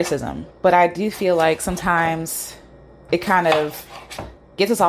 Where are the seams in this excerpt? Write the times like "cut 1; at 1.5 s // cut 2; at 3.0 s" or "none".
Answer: none